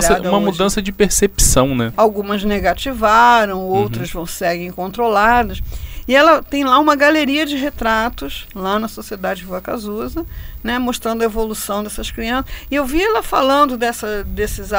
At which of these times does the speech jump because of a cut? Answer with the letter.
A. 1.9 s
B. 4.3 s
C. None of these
A